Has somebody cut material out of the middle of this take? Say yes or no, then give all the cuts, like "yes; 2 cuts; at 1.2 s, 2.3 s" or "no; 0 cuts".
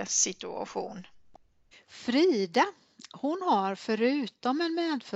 yes; 1 cut; at 1.7 s